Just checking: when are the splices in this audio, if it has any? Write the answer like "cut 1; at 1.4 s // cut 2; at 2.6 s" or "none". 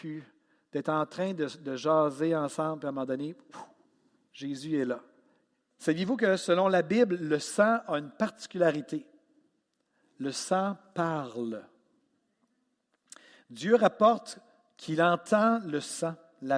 cut 1; at 5.7 s